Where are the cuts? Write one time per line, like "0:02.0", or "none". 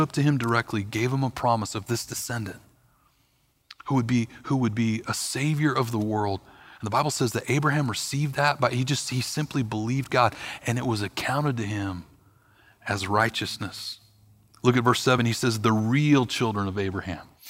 none